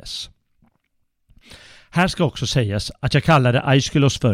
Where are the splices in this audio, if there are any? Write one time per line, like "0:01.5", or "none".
none